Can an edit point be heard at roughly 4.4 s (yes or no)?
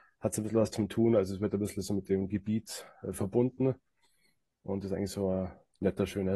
no